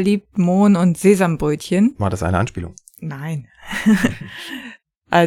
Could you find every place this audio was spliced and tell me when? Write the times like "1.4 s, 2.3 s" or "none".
none